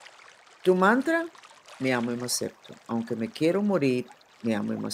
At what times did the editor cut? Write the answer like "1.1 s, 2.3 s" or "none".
1.7 s